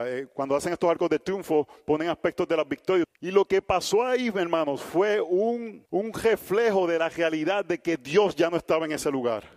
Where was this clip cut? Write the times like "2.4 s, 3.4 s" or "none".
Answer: 3.0 s, 5.9 s